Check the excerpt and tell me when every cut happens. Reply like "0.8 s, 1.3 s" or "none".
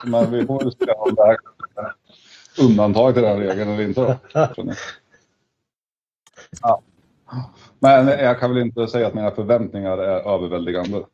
4.5 s, 6.6 s